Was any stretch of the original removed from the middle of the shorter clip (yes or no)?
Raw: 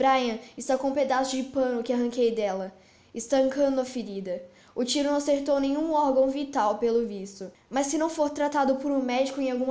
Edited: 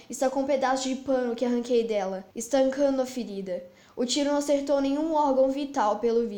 yes